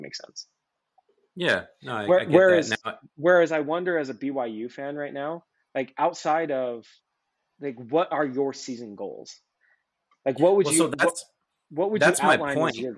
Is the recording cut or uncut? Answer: uncut